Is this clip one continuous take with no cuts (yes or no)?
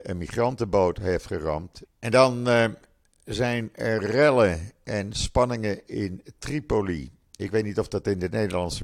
no